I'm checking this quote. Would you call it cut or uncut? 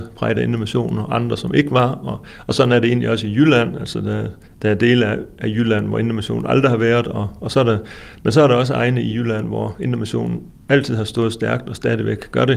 uncut